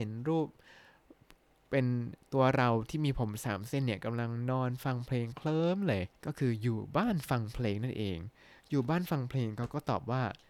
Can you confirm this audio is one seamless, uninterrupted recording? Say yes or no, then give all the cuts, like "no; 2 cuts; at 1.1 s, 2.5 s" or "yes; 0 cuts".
no; 1 cut; at 6.1 s